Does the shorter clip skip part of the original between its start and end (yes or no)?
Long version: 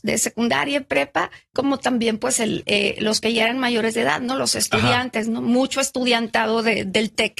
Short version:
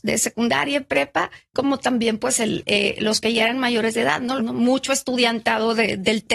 yes